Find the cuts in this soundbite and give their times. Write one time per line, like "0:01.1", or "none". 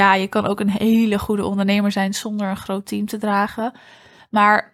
none